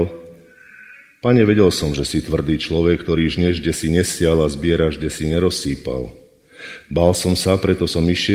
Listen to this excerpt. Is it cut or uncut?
uncut